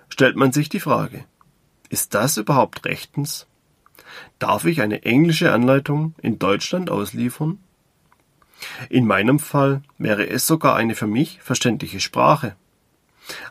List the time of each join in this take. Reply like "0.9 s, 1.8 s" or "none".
none